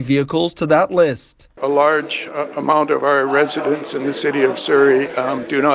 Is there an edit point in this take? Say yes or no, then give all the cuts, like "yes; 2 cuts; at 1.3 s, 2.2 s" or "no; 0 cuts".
no; 0 cuts